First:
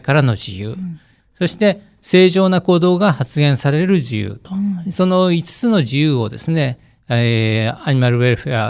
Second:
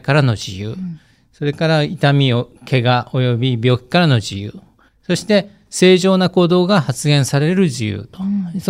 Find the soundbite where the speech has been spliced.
first; 1 cut; at 1.2 s

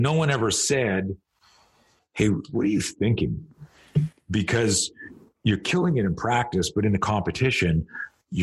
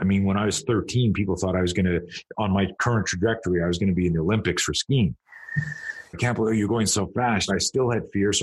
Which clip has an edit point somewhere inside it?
second; 2 cuts; at 6.1 s, 7.5 s

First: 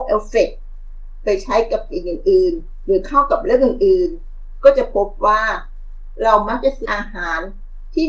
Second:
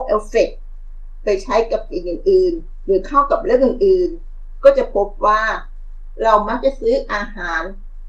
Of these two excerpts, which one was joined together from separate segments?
first; 1 cut; at 6.8 s

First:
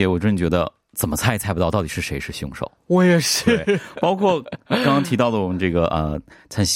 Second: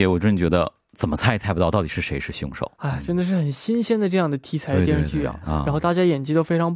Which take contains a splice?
second; 1 cut; at 2.8 s

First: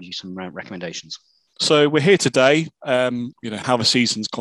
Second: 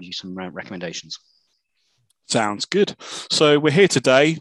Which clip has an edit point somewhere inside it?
first; 2 cuts; at 1.6 s, 3.3 s

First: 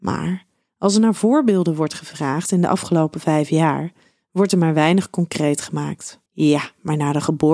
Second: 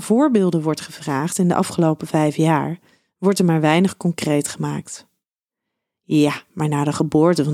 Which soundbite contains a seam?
first; 1 cut; at 6.3 s

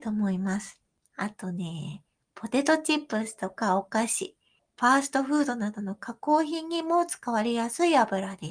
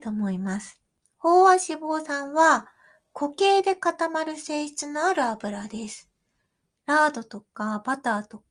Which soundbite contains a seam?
first; 2 cuts; at 1.1 s, 4.6 s

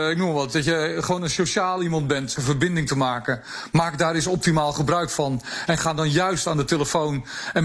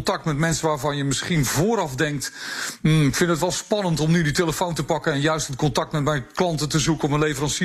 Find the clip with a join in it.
first; 1 cut; at 2.4 s

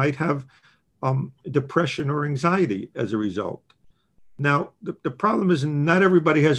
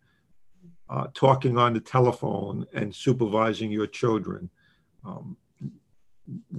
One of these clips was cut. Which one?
first; 1 cut; at 1.4 s

